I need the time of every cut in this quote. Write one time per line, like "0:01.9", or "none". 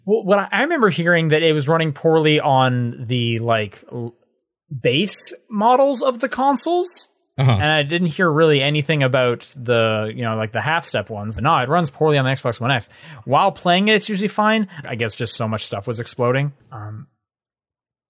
0:11.4
0:14.8
0:16.6